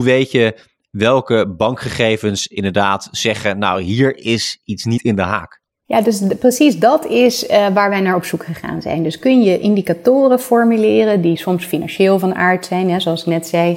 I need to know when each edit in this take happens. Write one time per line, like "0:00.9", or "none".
none